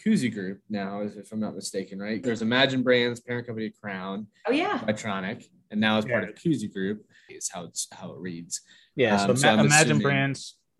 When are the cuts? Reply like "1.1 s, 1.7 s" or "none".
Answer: 2.2 s, 7.3 s